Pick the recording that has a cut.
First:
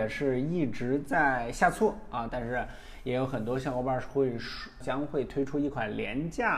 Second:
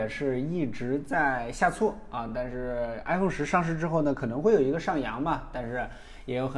first; 2 cuts; at 2.3 s, 4.8 s

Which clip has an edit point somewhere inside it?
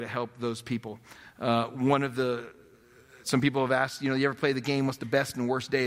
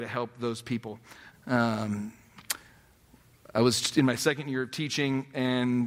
second; 1 cut; at 1.3 s

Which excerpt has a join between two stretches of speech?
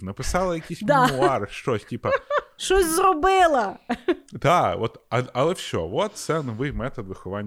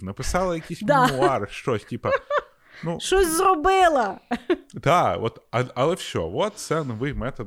first; 1 cut; at 2.6 s

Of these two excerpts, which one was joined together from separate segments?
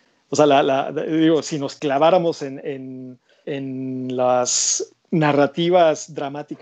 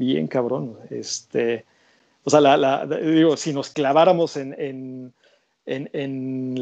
first; 2 cuts; at 3.4 s, 5.0 s

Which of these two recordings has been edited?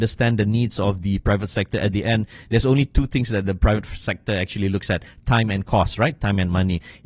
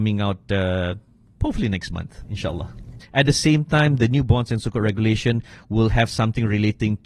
second; 1 cut; at 3.0 s

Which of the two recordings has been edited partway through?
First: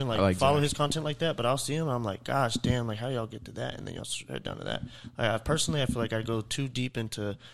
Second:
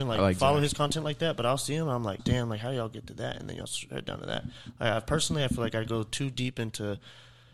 second; 1 cut; at 2.2 s

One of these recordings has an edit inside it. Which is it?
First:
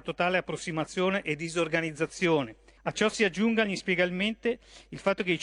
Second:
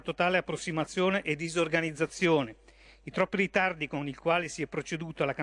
first; 1 cut; at 2.8 s

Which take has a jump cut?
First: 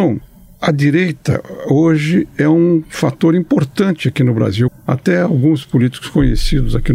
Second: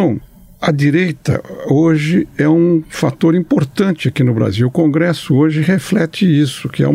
first; 1 cut; at 4.7 s

